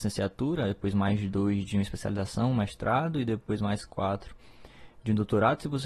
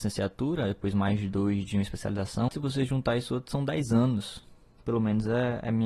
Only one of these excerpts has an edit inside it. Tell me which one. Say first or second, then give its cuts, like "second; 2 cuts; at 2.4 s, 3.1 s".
second; 2 cuts; at 2.5 s, 4.8 s